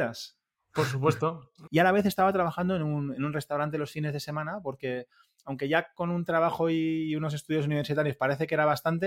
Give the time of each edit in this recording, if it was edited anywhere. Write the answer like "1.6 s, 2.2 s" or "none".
1.7 s